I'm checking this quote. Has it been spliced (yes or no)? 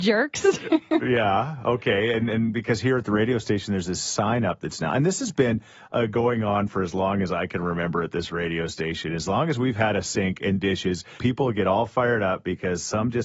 yes